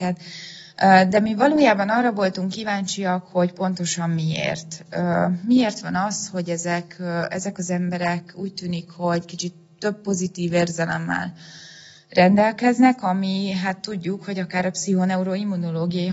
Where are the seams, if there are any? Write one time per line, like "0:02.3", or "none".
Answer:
none